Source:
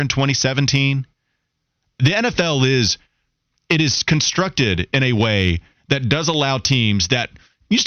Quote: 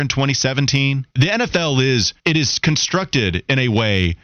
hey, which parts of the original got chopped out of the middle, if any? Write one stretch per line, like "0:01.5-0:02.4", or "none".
0:01.1-0:01.9
0:03.0-0:03.6

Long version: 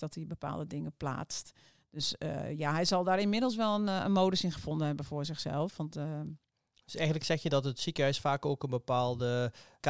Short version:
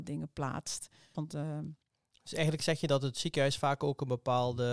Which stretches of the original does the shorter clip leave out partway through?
0:01.8-0:05.8

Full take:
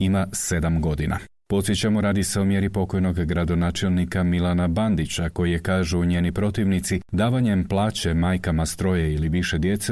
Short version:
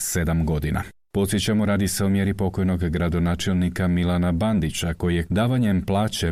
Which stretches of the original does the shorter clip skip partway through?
0:05.6-0:07.1

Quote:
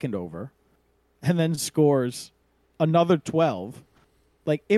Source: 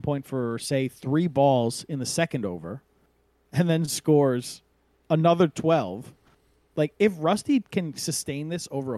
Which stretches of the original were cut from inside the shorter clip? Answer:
none

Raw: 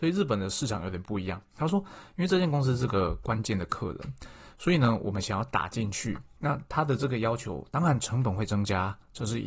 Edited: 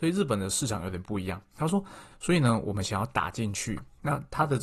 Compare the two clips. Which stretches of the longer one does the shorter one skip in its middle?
0:02.1-0:04.5

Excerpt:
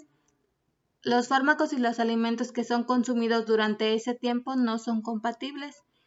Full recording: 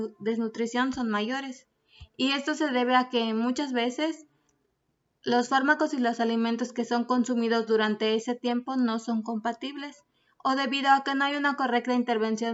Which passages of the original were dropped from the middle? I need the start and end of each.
none

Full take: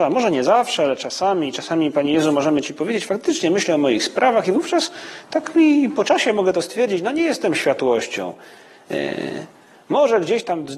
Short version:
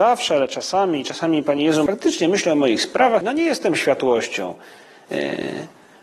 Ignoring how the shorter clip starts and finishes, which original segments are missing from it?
0:02.3-0:03.1
0:04.4-0:07.0

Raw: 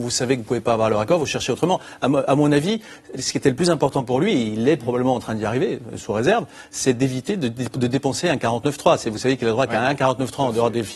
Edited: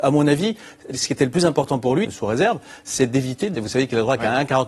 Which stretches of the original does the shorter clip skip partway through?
0:04.3-0:05.9
0:07.4-0:09.0

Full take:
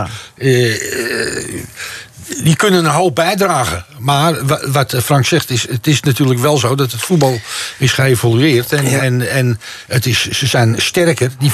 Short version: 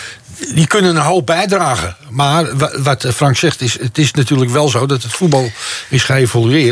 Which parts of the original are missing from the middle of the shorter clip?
none

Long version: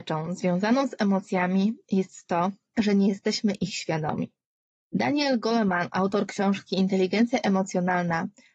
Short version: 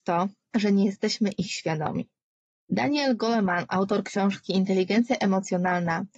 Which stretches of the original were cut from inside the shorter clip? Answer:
none

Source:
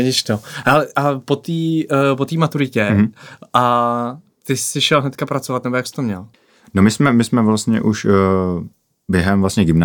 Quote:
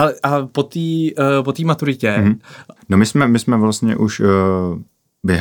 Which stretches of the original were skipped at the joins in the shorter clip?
0:03.5-0:06.6

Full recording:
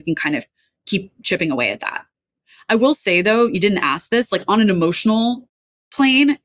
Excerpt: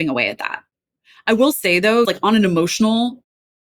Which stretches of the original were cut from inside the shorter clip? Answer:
0:03.5-0:04.3

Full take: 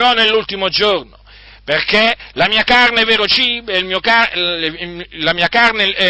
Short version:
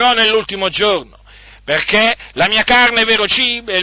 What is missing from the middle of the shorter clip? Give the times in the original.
none

